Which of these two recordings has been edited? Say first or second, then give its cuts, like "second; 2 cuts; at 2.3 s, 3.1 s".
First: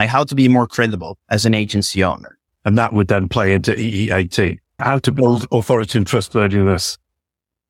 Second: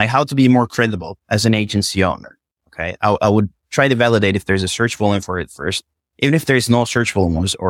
first; 2 cuts; at 2.5 s, 4.8 s